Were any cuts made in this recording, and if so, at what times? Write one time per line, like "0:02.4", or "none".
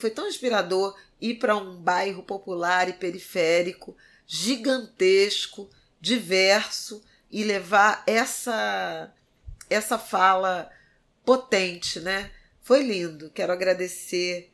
0:07.3

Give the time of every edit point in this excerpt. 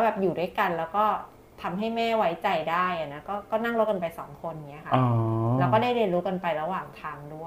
none

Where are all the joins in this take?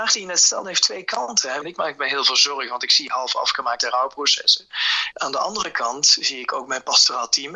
0:01.6
0:05.1

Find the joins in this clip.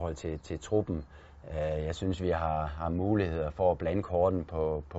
none

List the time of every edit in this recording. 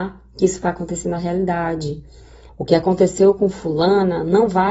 0:02.5

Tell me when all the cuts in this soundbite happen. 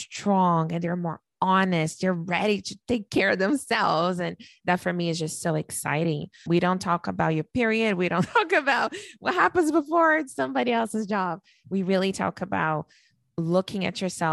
0:06.5

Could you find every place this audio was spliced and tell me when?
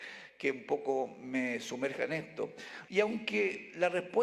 0:02.9

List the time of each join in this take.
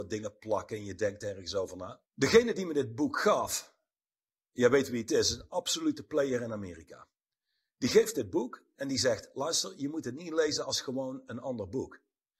0:02.1

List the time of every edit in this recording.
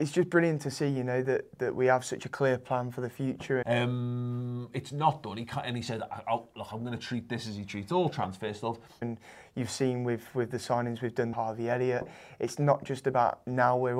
0:03.6
0:09.0
0:11.3

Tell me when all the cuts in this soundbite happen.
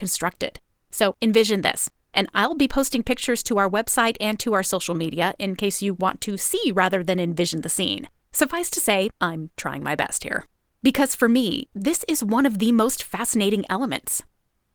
0:08.2
0:10.7

